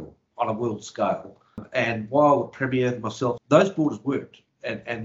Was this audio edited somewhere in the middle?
yes; 1 cut; at 3.4 s

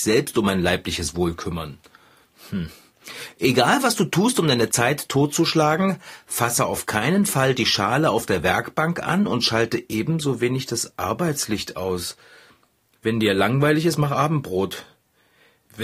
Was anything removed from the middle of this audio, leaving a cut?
no; 0 cuts

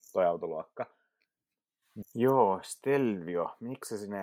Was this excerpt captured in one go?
no; 1 cut; at 2.0 s

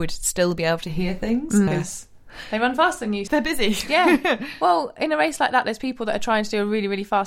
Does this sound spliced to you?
yes; 2 cuts; at 1.7 s, 3.3 s

